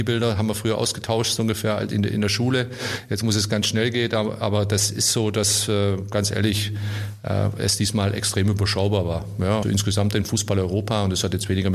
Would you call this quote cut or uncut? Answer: cut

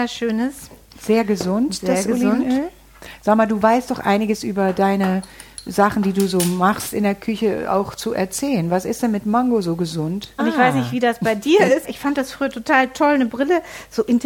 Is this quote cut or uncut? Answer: cut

